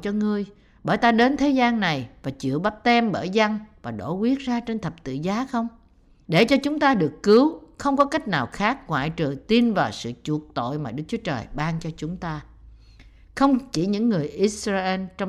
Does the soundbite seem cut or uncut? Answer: cut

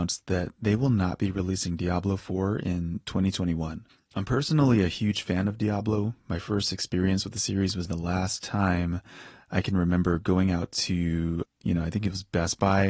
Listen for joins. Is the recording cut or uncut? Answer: cut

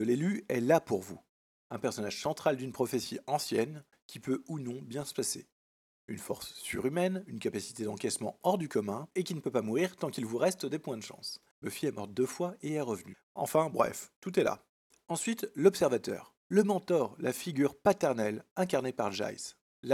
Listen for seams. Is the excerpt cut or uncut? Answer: cut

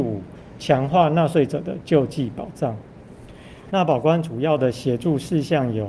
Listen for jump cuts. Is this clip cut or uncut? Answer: cut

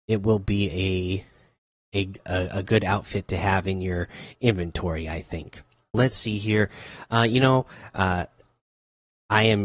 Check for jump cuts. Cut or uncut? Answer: cut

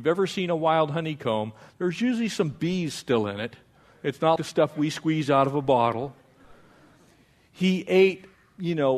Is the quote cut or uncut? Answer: cut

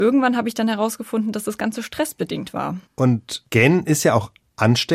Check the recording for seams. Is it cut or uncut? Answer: uncut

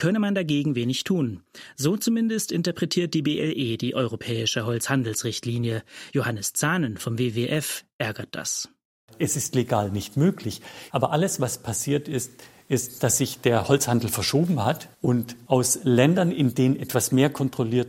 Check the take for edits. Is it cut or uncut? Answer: uncut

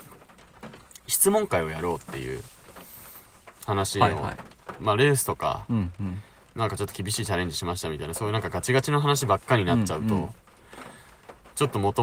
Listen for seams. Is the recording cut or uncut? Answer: cut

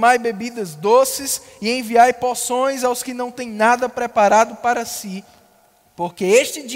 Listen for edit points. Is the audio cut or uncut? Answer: uncut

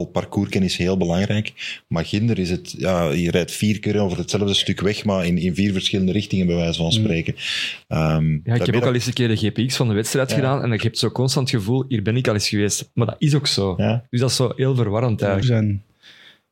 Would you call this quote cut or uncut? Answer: cut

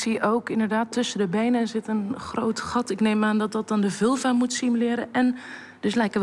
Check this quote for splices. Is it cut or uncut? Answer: uncut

